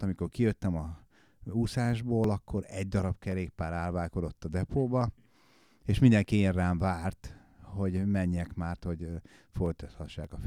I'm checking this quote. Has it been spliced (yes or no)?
no